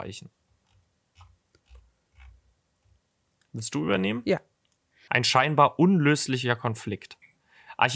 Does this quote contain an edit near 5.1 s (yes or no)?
yes